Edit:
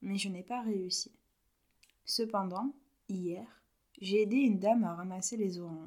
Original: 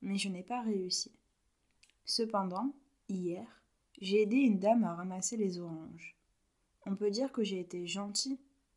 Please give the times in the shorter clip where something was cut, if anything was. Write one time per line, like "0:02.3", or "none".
none